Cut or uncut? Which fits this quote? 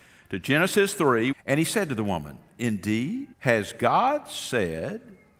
cut